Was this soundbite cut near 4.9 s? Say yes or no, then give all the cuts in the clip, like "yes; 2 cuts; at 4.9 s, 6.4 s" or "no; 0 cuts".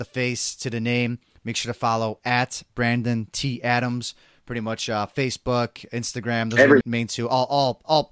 no; 1 cut; at 6.8 s